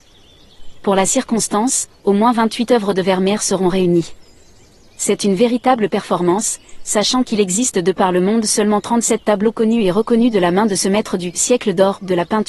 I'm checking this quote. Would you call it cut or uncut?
uncut